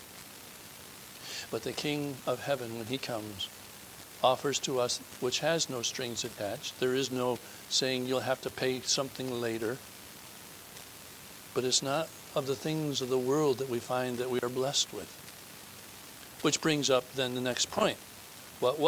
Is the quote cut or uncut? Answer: cut